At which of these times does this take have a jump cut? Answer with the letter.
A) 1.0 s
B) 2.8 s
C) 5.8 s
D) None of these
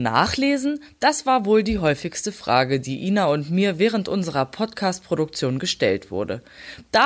D